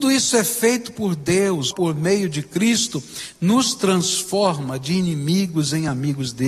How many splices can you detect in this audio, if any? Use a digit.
1